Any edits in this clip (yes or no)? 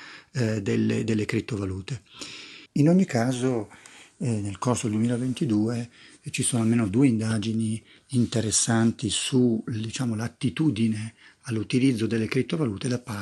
yes